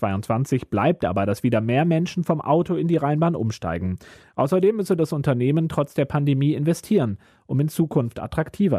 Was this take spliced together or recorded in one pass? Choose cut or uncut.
uncut